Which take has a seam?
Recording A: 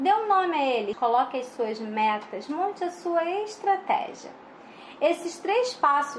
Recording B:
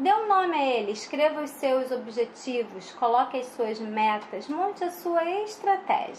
A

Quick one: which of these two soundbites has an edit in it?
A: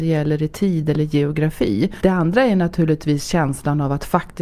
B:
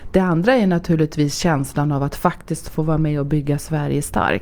A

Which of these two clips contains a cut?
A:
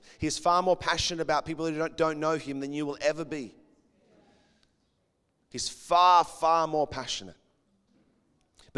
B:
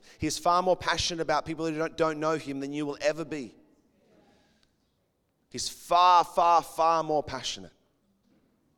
A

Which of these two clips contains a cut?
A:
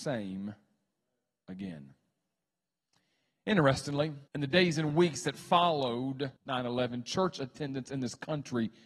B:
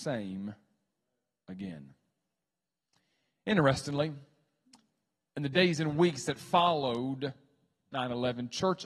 A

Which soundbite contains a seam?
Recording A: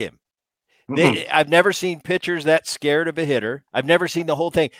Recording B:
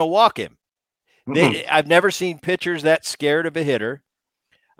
A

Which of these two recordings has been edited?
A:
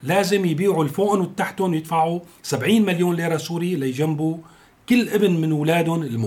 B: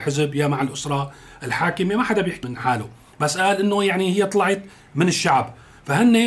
B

